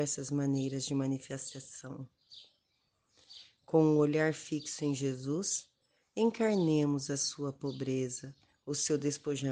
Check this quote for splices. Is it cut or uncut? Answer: uncut